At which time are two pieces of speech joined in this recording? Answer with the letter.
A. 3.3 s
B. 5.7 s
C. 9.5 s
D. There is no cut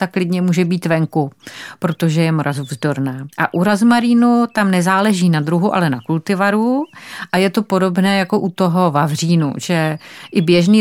A